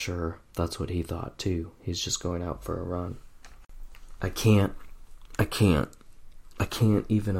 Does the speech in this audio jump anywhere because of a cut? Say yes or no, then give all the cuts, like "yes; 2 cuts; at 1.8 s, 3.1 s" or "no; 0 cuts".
no; 0 cuts